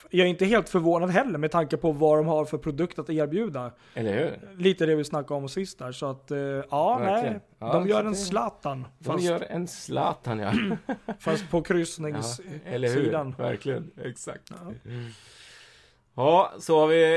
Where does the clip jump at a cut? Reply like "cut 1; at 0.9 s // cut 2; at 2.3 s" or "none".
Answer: none